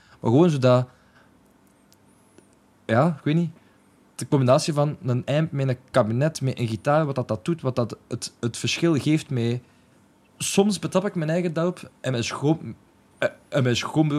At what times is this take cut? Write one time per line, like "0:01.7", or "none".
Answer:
none